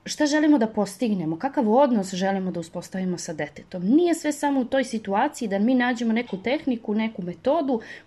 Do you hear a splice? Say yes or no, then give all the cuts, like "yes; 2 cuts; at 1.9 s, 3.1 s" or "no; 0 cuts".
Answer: no; 0 cuts